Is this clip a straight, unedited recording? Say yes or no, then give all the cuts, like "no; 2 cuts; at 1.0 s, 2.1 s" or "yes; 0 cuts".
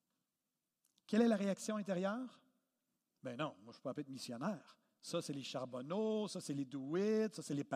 yes; 0 cuts